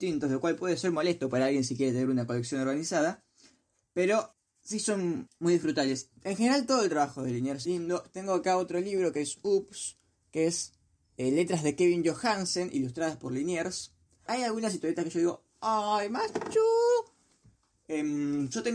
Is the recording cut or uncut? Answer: cut